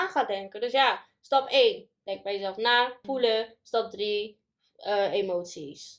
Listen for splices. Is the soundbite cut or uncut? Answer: cut